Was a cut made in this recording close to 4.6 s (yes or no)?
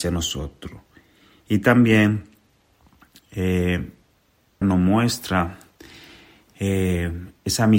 yes